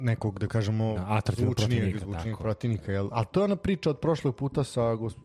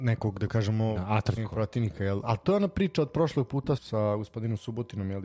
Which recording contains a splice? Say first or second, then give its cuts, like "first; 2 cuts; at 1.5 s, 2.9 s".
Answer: second; 2 cuts; at 1.4 s, 3.8 s